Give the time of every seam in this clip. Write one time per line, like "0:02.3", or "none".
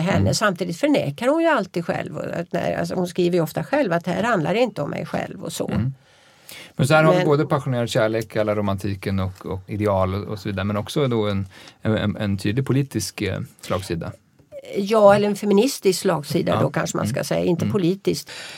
none